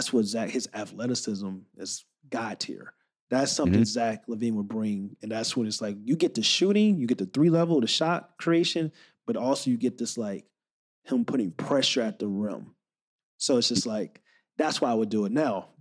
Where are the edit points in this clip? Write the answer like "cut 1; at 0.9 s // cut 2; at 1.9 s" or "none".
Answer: none